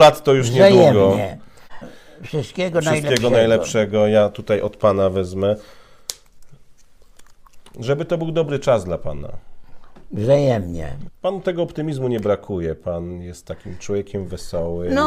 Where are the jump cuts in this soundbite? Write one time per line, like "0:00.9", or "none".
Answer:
0:01.8
0:11.1